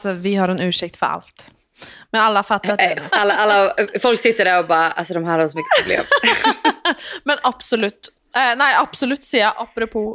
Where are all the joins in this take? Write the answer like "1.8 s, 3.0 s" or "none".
3.1 s